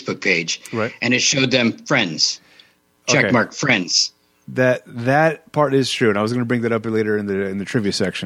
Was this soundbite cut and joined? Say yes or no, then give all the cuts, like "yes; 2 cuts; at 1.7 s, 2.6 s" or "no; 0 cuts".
no; 0 cuts